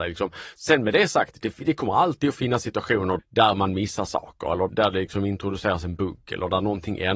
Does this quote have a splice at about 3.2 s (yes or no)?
yes